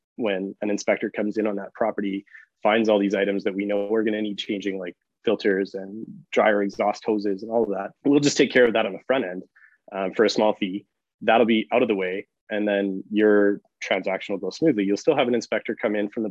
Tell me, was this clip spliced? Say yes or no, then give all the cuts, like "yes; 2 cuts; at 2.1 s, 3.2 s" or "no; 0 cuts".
yes; 1 cut; at 8.0 s